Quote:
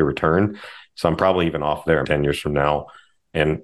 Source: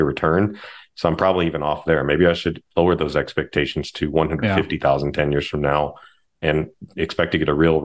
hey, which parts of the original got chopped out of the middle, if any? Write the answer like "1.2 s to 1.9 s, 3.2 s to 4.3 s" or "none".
2.0 s to 5.1 s